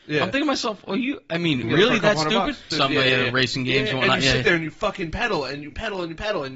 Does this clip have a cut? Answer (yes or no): yes